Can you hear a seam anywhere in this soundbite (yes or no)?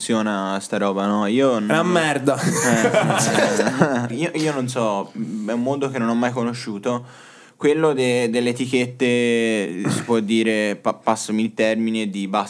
yes